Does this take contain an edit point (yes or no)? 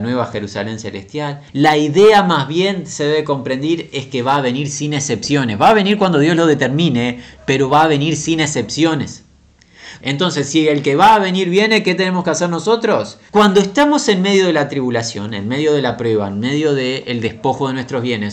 yes